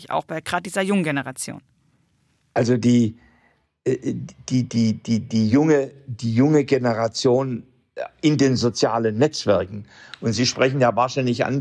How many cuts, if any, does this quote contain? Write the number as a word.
zero